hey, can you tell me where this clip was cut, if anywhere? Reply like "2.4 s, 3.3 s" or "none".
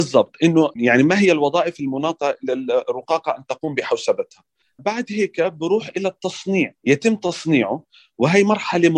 6.8 s